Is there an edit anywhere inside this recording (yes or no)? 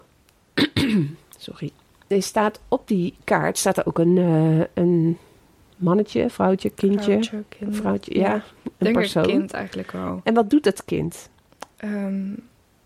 no